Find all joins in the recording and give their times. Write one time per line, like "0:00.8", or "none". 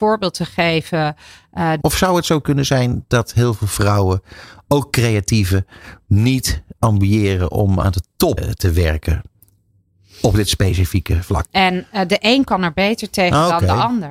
0:01.8
0:08.4
0:11.4

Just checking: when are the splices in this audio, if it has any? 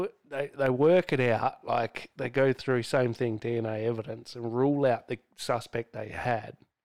none

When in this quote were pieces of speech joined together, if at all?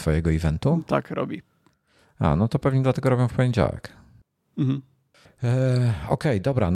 0:05.3

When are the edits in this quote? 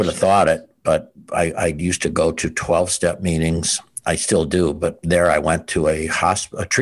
none

